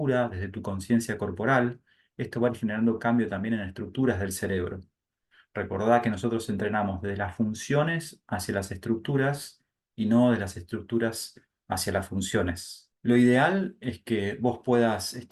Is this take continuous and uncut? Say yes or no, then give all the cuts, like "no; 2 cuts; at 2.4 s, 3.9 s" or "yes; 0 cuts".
no; 1 cut; at 12.9 s